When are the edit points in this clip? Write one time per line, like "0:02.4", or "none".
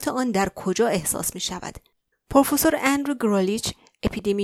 0:02.1